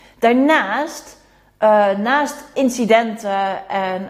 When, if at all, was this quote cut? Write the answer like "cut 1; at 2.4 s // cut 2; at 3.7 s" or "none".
cut 1; at 2.5 s